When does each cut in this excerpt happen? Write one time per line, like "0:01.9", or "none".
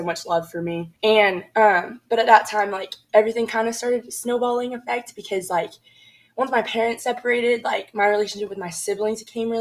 0:01.0